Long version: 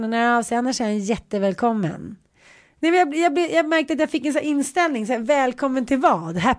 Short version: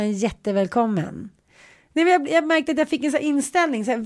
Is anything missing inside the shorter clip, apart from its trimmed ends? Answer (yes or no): yes